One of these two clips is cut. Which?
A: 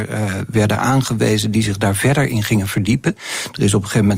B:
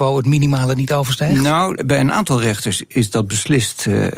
B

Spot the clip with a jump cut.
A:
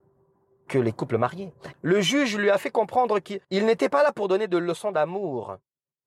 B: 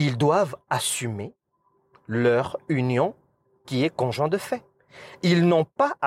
A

